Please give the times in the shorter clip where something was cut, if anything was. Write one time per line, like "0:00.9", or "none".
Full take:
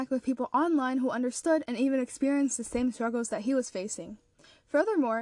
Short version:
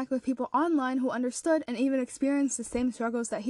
none